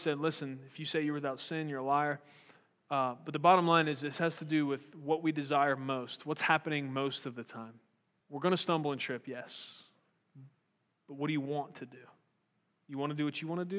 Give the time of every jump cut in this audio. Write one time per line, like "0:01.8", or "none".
0:08.2